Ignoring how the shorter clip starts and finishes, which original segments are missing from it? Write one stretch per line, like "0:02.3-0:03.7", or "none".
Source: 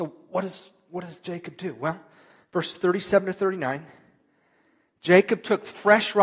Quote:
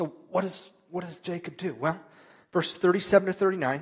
none